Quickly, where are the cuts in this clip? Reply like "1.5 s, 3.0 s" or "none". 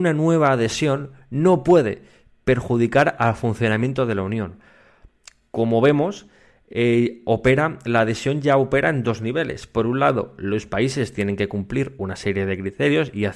none